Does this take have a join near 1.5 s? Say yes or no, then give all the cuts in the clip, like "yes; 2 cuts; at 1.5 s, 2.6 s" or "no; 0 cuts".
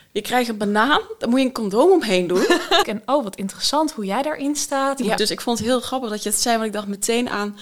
no; 2 cuts; at 2.8 s, 5.2 s